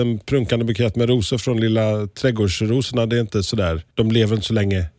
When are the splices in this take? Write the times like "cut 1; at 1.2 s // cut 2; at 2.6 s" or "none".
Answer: none